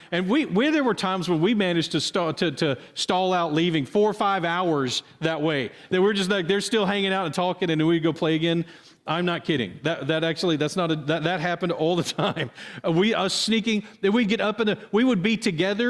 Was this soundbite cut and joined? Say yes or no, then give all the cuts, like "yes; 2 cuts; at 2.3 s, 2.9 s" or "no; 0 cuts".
no; 0 cuts